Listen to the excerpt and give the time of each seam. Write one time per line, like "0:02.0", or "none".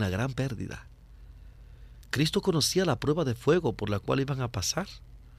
none